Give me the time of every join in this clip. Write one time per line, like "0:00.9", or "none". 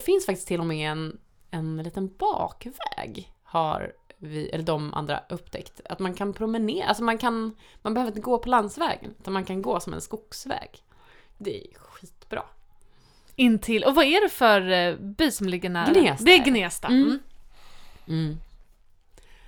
none